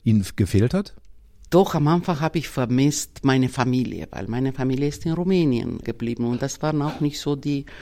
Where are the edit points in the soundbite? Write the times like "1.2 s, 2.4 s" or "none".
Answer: 5.8 s